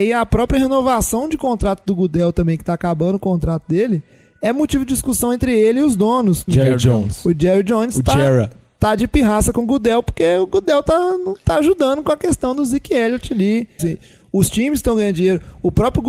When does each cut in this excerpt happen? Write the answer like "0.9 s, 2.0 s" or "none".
6.5 s, 13.8 s